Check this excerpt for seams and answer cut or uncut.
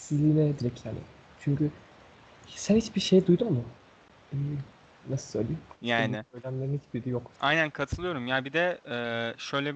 cut